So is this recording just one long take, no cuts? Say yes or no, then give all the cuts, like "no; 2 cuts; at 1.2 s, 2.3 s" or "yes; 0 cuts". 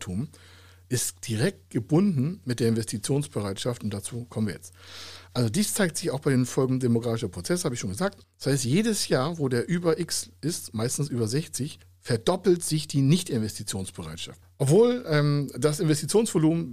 no; 2 cuts; at 8.2 s, 14.4 s